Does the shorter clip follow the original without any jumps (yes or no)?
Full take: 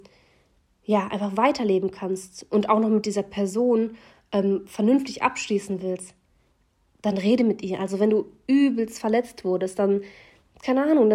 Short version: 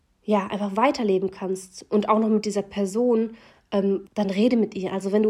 no